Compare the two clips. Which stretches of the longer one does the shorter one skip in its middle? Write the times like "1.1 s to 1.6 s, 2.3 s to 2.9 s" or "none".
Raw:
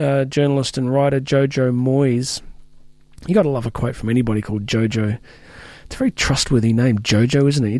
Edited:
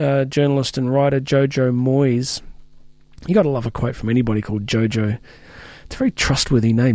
none